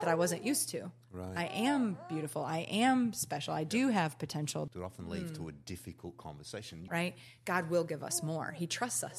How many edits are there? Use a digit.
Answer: 2